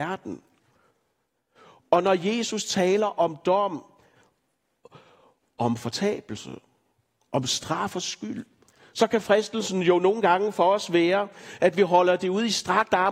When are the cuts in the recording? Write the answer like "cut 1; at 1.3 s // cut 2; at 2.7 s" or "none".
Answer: none